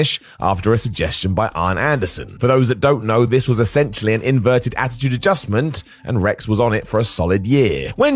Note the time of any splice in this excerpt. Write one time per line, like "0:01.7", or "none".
none